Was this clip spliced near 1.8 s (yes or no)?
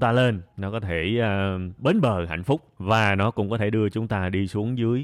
yes